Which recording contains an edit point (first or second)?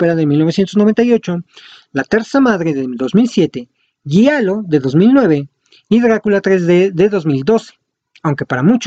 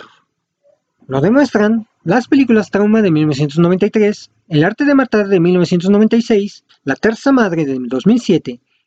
second